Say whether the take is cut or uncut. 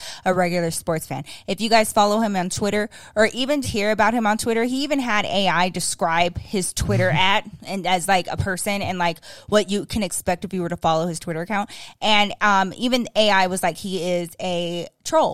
cut